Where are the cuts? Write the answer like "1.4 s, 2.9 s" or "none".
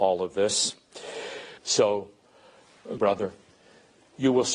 1.6 s, 3.0 s